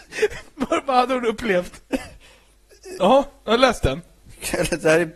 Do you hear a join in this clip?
yes; 1 cut; at 3.0 s

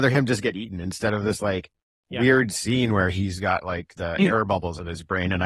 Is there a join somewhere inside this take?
no; 0 cuts

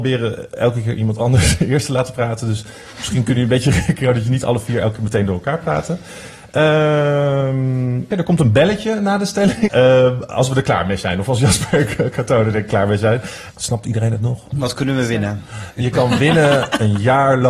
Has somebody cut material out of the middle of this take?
yes; 3 cuts; at 8.1 s, 9.7 s, 13.5 s

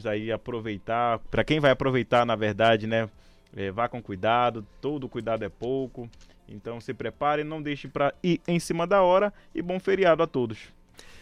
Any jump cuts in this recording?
no; 0 cuts

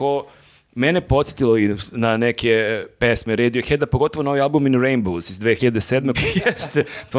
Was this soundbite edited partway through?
yes; 1 cut; at 6.1 s

